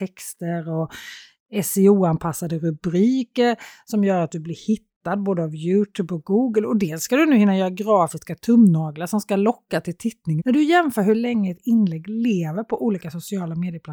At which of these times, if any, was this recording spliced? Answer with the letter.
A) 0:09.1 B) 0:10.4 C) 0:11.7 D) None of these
B